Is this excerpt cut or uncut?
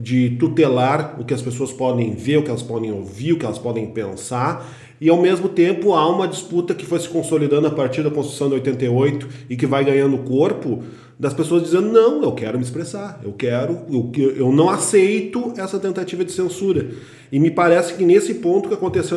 uncut